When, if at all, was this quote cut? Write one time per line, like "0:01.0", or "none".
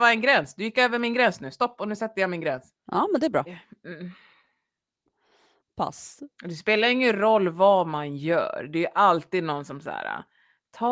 0:03.5